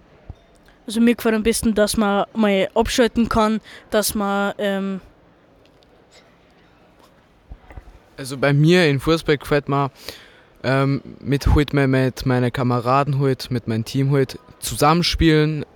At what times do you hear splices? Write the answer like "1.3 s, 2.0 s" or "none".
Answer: none